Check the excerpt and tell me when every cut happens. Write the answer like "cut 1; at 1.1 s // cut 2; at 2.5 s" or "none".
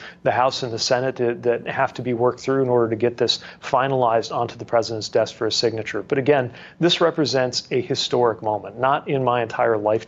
none